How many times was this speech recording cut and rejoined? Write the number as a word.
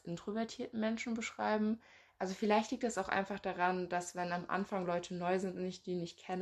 zero